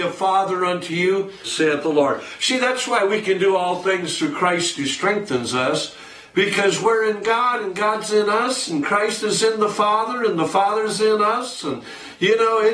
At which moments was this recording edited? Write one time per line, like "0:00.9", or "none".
0:01.4